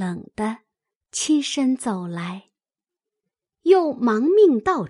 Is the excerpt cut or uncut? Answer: uncut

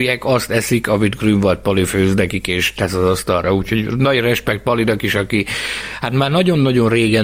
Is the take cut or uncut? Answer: uncut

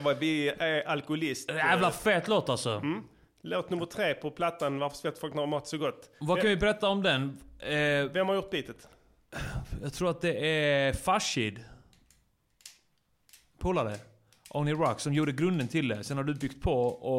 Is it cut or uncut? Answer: uncut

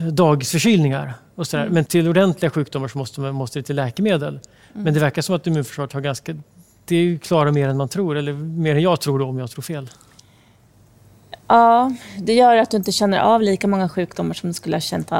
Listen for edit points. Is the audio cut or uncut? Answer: cut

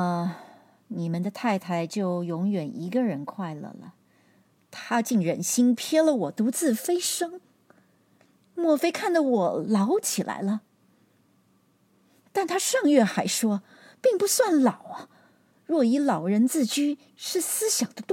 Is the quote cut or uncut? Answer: uncut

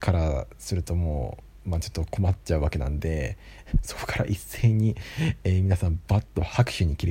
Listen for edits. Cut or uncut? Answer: uncut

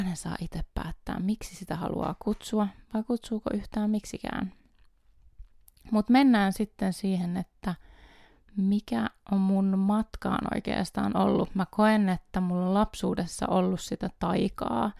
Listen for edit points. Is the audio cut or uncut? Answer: uncut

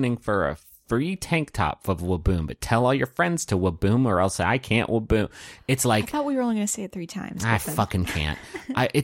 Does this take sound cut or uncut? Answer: uncut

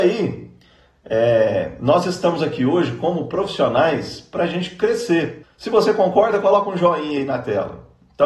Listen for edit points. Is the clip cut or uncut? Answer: cut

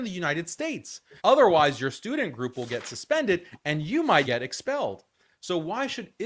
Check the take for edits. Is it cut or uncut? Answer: cut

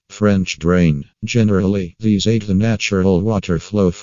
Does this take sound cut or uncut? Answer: cut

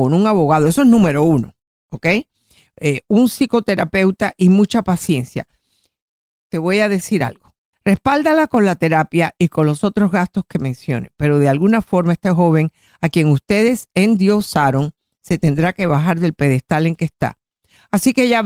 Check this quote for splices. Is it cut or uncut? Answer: cut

